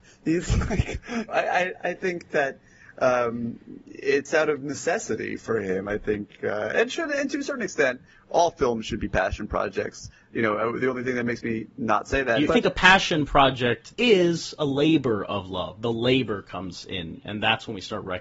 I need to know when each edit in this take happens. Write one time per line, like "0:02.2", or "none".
0:01.3
0:12.5
0:13.9